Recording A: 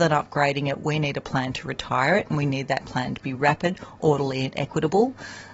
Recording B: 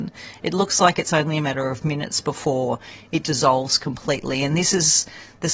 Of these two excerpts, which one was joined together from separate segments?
B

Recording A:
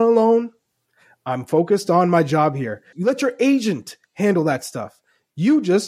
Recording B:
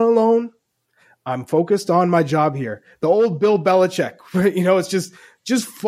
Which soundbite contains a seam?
A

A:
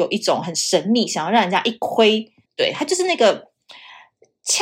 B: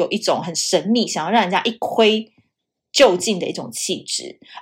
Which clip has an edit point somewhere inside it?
A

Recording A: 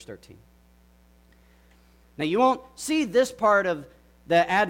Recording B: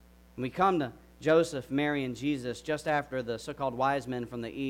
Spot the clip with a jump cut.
A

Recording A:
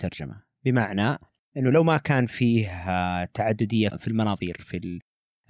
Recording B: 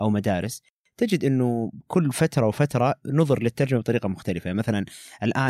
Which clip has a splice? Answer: A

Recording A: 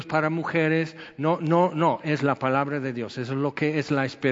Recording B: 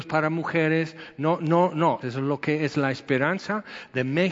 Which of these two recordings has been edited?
B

